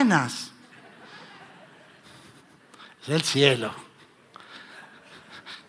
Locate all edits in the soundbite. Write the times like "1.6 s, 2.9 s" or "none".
none

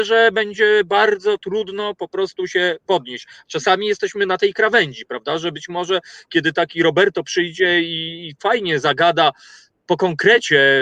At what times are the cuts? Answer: none

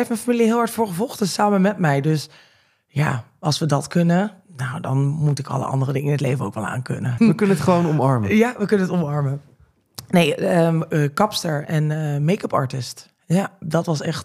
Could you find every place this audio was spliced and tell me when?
7.2 s

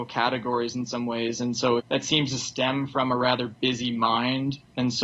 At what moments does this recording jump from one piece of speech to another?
1.8 s

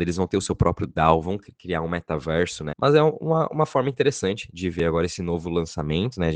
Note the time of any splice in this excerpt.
2.7 s

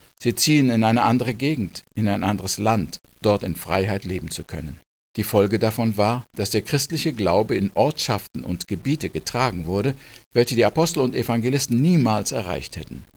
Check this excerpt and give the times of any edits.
3.2 s, 4.9 s

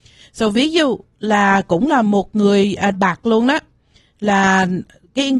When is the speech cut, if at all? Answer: 2.9 s

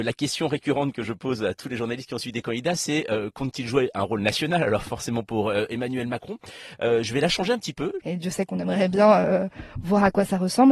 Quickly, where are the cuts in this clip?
8.0 s

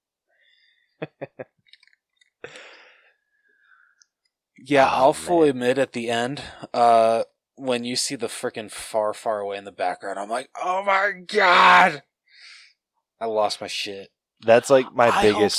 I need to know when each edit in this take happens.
14.3 s

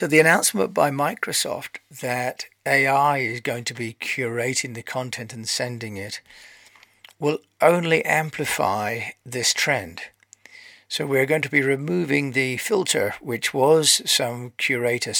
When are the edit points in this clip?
none

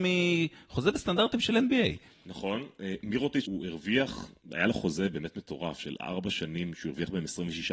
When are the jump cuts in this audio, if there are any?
3.5 s

